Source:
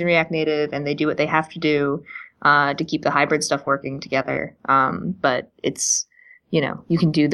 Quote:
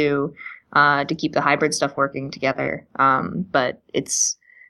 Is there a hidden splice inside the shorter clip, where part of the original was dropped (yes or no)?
no